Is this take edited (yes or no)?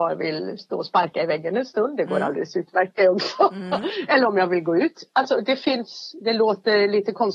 no